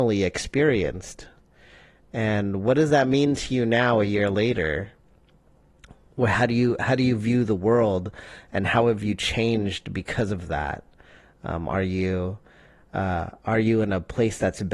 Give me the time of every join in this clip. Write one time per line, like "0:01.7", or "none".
none